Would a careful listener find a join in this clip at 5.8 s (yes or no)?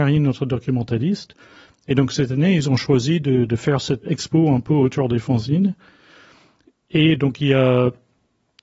no